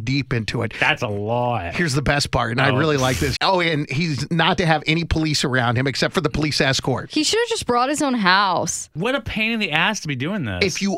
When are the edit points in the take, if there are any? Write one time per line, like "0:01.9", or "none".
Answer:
0:03.4
0:07.1